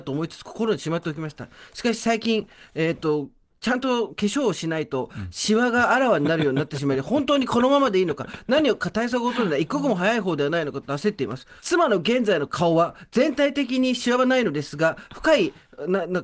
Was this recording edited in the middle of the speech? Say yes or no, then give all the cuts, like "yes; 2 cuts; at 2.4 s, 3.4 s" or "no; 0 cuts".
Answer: yes; 1 cut; at 11.6 s